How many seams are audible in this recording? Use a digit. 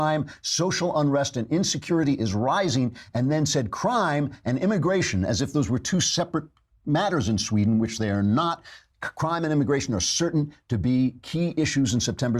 0